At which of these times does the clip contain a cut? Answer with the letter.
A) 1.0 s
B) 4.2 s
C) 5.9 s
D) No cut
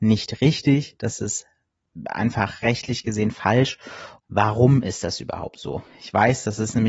B